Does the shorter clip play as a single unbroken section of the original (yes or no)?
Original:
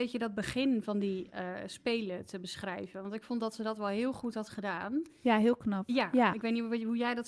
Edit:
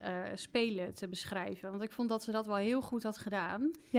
yes